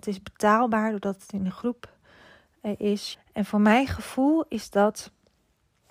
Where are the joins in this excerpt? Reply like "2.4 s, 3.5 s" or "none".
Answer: 3.1 s